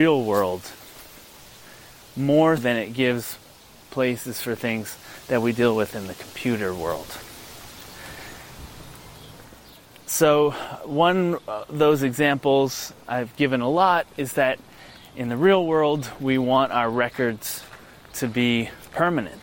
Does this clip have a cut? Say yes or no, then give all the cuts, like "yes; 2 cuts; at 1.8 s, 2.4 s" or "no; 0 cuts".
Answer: yes; 1 cut; at 2.6 s